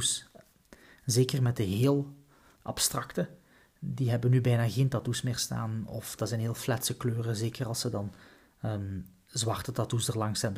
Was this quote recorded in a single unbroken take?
no; 1 cut; at 2.6 s

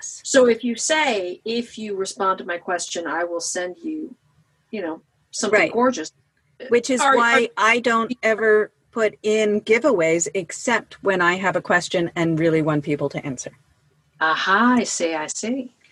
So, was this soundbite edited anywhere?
no; 0 cuts

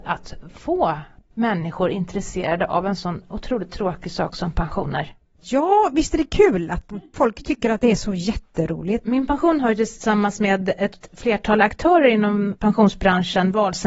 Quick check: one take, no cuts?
no; 1 cut; at 9.0 s

